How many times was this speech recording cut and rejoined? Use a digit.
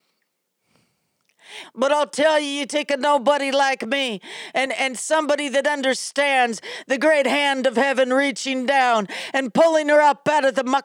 2